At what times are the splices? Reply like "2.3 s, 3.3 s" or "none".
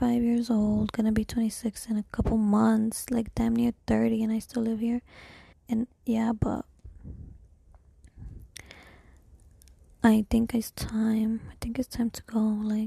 5.5 s